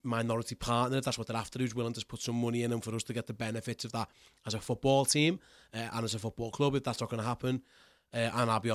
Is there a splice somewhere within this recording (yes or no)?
no